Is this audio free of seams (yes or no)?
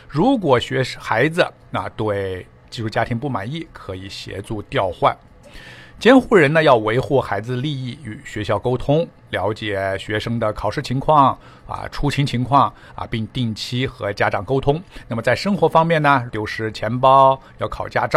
no